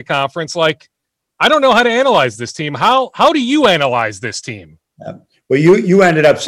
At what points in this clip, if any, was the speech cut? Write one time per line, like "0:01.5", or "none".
none